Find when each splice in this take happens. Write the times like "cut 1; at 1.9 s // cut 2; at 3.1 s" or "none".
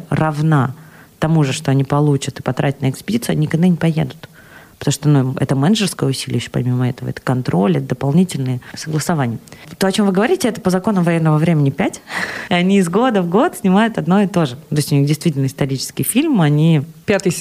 cut 1; at 12.5 s